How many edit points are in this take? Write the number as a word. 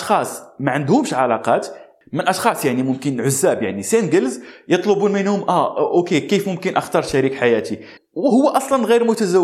one